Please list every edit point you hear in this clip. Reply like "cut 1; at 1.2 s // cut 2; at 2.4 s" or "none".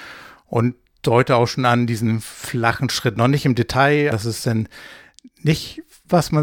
cut 1; at 4.1 s